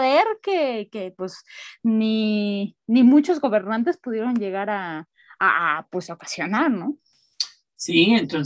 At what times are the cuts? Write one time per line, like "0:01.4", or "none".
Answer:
none